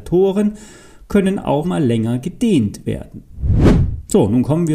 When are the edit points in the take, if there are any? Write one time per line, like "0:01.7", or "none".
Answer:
0:01.6